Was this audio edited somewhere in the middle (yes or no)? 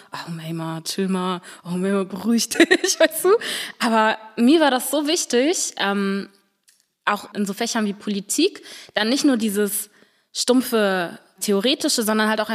no